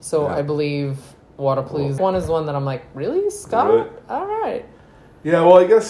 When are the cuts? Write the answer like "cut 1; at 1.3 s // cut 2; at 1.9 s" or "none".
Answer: cut 1; at 2.0 s